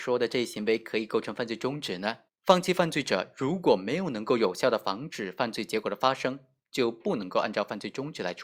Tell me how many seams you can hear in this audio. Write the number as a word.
one